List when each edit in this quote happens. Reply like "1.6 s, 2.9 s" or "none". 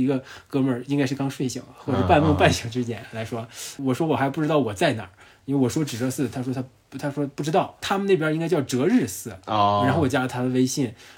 none